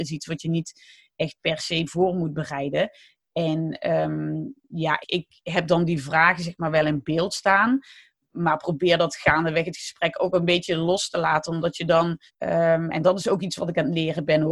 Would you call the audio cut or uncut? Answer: cut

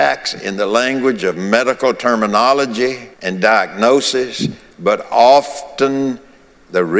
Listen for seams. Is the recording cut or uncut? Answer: cut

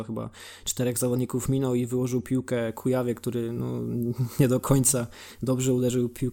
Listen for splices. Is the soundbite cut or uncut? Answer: uncut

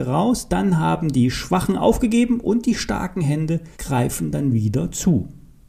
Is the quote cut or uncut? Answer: cut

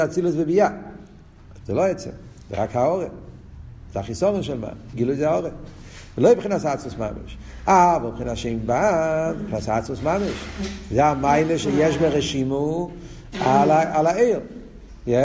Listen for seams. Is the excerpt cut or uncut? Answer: cut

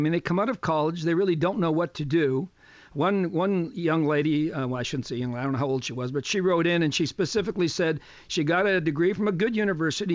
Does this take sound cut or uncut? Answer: uncut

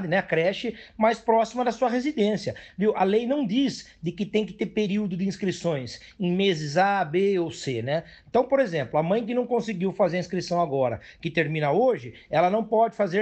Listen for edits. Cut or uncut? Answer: uncut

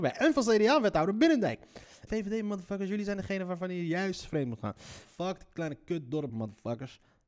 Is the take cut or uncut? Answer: cut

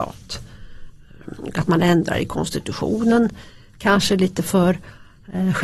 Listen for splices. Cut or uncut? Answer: uncut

